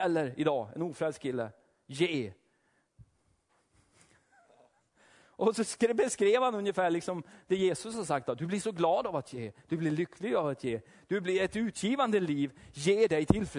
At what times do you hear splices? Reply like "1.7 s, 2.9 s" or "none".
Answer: none